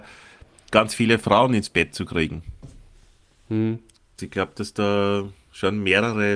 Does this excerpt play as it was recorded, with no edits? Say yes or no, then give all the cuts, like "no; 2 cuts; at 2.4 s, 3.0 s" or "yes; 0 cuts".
no; 1 cut; at 4.2 s